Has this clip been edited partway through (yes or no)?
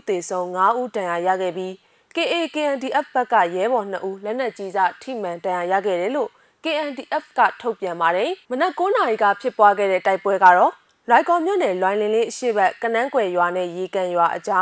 yes